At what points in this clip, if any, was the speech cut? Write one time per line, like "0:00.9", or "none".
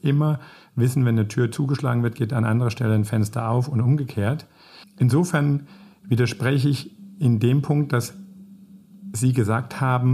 0:04.8